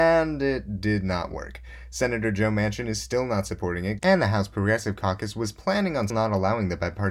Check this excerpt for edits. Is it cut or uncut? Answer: cut